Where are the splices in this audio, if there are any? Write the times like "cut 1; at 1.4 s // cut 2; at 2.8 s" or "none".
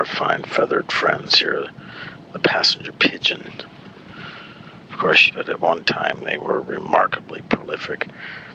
cut 1; at 5.3 s